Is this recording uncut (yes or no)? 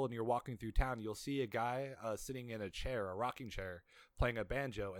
yes